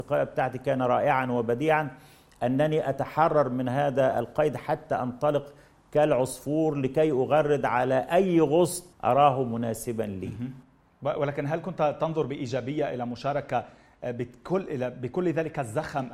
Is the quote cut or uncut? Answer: cut